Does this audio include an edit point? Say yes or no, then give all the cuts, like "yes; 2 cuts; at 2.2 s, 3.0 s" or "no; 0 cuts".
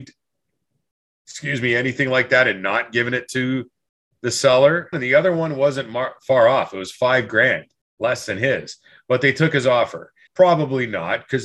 yes; 2 cuts; at 4.9 s, 10.3 s